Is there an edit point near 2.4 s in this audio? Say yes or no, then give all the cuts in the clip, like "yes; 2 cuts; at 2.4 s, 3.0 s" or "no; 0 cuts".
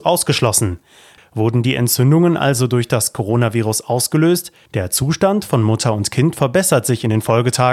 no; 2 cuts; at 1.2 s, 4.7 s